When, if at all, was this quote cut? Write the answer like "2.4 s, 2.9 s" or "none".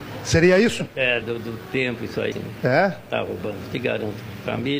1.2 s, 2.3 s